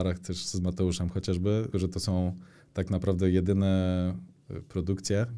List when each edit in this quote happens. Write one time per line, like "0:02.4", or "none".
0:01.7